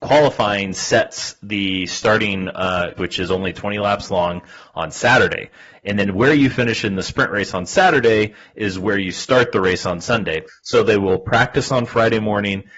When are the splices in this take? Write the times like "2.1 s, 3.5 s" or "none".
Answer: 3.0 s, 10.5 s